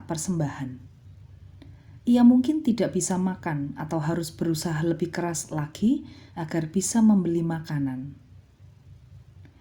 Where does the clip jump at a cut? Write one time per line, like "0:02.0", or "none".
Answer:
0:02.0